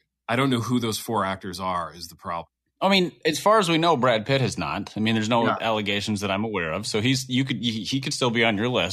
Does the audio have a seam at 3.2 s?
no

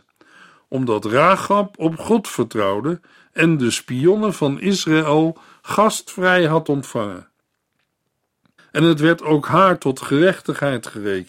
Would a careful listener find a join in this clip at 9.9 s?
no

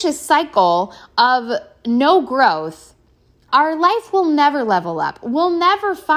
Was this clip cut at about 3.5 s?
yes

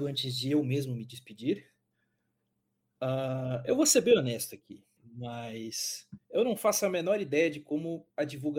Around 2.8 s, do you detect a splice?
no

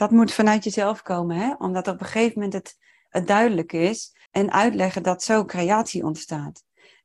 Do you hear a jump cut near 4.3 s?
yes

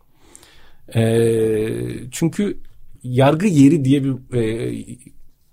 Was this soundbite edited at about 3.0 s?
yes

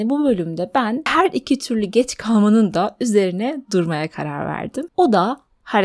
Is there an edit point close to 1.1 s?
no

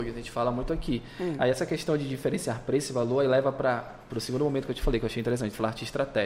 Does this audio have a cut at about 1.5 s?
no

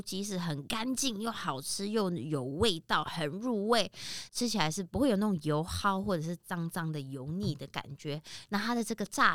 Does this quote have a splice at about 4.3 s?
yes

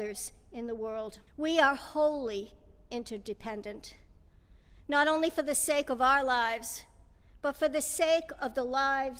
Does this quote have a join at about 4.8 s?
no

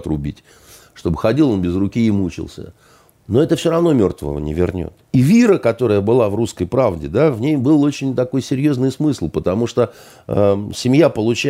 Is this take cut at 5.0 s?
yes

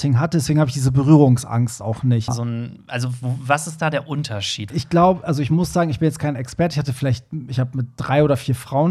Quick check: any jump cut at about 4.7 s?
yes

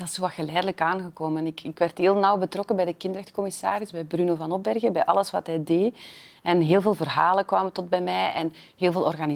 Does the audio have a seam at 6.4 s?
no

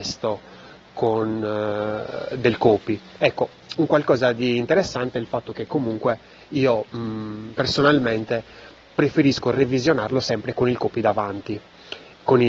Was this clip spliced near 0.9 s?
no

